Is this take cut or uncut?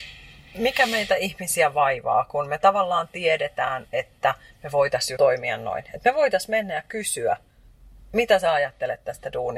cut